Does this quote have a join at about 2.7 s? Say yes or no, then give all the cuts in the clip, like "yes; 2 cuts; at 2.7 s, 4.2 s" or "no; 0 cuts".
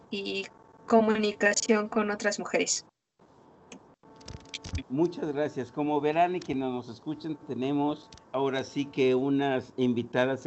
no; 2 cuts; at 4.8 s, 8.2 s